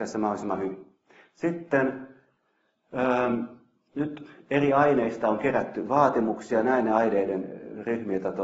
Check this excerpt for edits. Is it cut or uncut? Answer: uncut